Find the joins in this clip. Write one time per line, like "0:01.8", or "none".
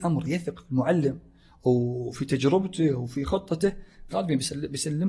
0:04.1